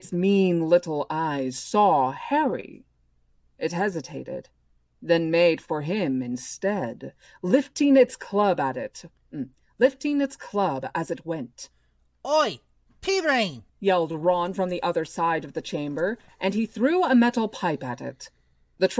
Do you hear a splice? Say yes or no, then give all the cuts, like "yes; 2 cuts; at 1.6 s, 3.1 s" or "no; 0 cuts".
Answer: yes; 1 cut; at 13.7 s